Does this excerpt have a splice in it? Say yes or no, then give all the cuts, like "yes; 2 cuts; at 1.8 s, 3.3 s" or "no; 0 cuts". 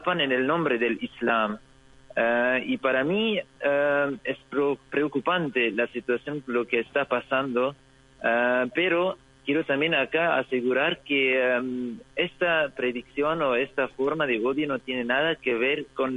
no; 0 cuts